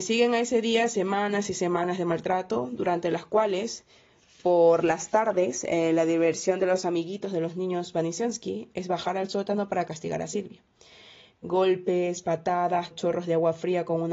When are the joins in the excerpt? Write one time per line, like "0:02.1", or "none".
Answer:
0:12.9

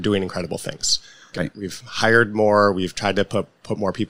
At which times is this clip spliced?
0:01.3

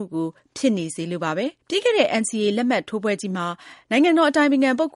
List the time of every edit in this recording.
0:01.6

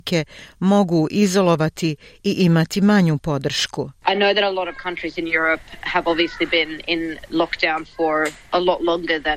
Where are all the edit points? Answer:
0:04.0

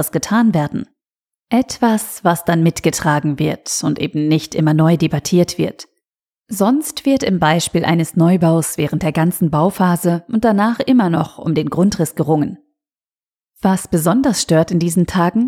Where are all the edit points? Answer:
none

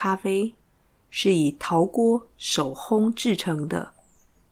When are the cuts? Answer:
none

